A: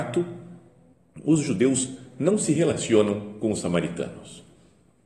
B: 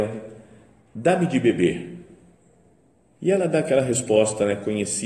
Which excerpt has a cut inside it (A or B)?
B